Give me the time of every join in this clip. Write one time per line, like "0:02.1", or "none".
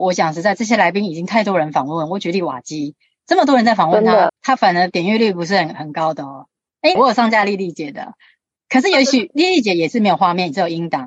0:04.3
0:07.0